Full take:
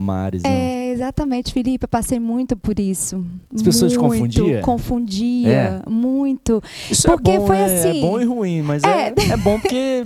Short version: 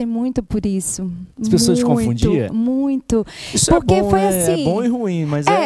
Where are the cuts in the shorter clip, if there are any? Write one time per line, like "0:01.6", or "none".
0:02.5